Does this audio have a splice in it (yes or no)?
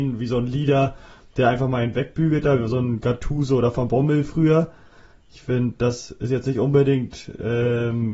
no